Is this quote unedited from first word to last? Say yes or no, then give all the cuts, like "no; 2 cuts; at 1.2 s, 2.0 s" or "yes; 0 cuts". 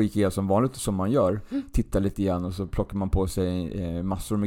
yes; 0 cuts